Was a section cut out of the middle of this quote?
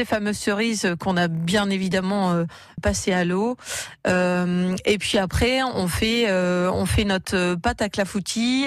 yes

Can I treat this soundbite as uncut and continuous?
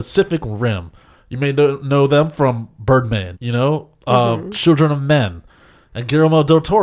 no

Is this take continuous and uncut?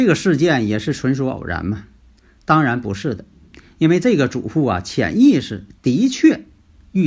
yes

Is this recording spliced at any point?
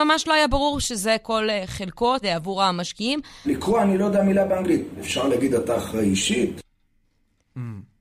yes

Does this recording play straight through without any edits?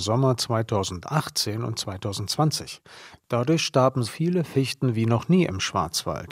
no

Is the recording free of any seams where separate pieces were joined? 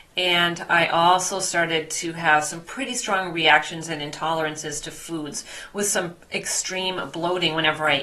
yes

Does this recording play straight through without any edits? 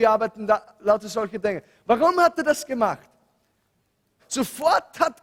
no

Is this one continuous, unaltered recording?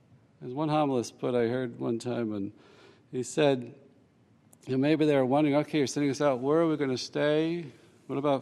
yes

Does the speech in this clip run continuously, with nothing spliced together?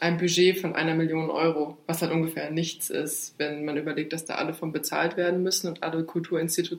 yes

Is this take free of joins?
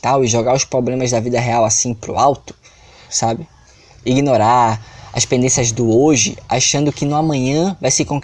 no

